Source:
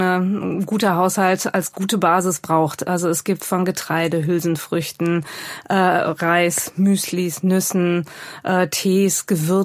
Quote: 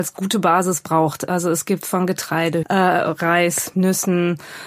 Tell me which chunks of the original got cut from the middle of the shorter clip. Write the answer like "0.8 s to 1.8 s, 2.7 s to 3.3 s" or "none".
4.2 s to 5.6 s, 6.7 s to 7.4 s